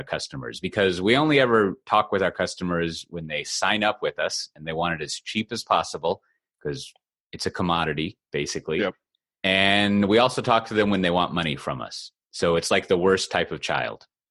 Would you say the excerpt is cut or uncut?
uncut